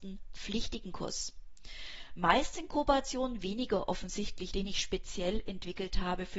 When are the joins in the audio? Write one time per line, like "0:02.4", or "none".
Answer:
0:04.5